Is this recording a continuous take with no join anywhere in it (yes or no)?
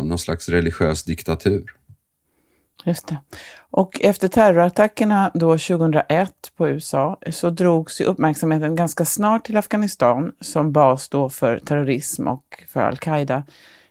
yes